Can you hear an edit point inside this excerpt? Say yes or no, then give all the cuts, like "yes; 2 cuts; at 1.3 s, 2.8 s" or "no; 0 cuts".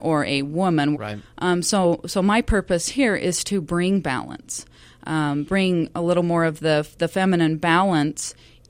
yes; 1 cut; at 0.9 s